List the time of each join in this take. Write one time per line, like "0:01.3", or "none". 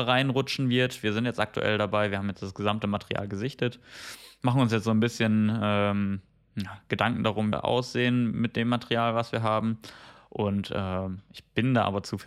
0:07.5